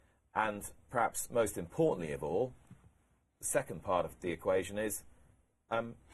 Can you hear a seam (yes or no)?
yes